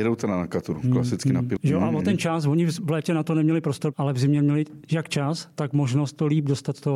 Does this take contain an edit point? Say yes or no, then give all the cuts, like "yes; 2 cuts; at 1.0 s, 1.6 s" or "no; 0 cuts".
yes; 2 cuts; at 1.6 s, 3.9 s